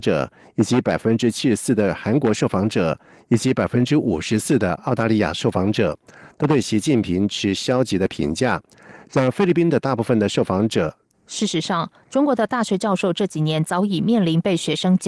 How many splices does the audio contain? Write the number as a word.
one